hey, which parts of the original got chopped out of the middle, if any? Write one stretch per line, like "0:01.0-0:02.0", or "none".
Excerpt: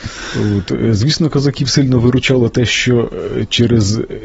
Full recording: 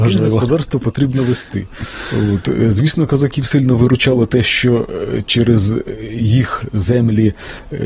none